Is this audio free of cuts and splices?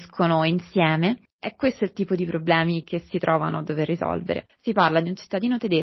no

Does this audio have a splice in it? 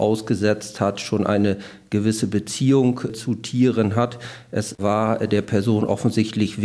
no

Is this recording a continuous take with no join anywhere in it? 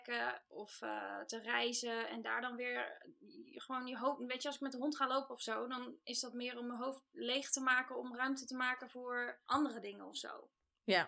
yes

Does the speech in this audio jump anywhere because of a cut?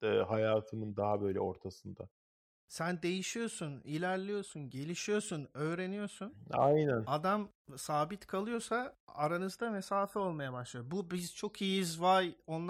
no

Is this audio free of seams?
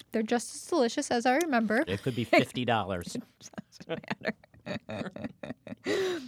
no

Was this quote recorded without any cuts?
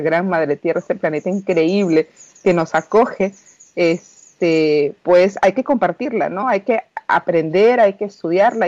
yes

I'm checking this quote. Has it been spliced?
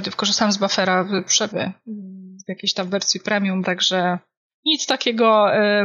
yes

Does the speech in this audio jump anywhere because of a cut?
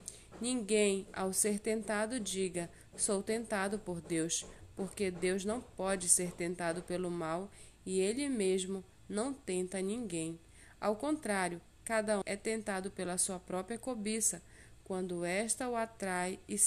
yes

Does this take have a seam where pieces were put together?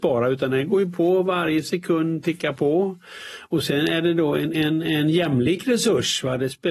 no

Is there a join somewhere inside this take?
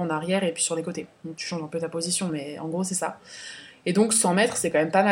no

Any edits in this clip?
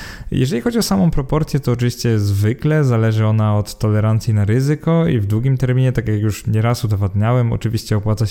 no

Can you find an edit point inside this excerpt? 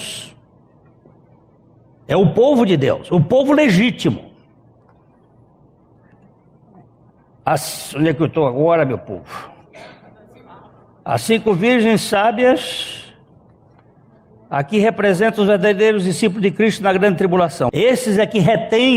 yes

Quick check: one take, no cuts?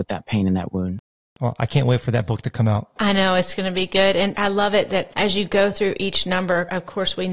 yes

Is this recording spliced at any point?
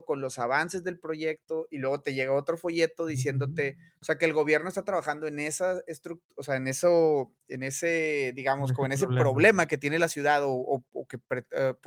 no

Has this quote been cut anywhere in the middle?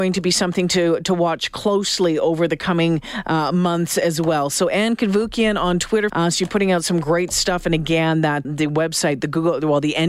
yes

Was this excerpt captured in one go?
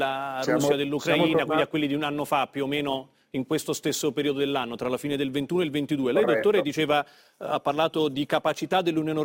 yes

